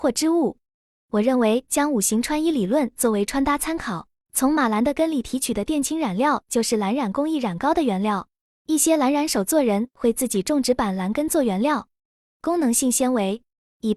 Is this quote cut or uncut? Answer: cut